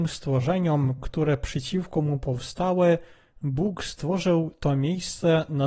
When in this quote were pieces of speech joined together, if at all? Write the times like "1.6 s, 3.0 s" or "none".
none